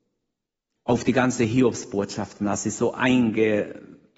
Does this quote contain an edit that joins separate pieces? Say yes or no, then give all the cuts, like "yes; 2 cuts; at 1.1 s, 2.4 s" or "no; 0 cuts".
no; 0 cuts